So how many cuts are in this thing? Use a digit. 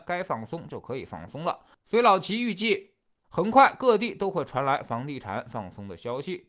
0